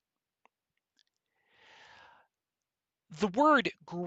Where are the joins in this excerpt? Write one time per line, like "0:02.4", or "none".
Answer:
none